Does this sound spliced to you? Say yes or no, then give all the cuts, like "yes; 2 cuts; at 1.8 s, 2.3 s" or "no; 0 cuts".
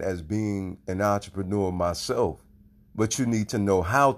yes; 1 cut; at 2.8 s